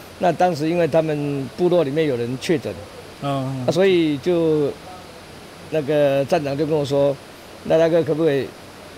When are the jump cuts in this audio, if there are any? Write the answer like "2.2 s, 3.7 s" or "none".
none